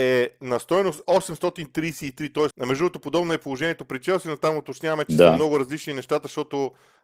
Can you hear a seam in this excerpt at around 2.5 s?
yes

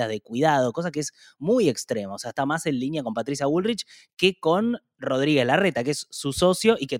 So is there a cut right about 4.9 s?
no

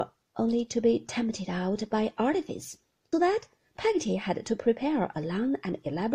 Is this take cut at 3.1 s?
yes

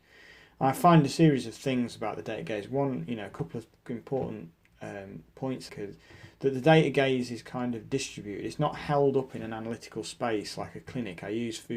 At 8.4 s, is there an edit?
no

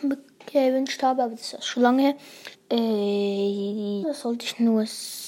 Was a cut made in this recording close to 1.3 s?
no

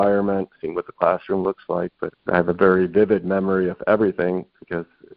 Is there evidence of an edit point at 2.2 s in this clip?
yes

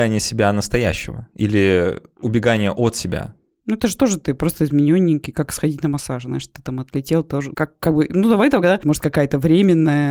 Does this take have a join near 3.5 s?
no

